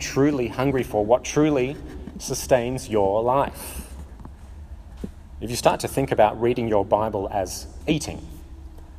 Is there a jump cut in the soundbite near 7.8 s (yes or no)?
yes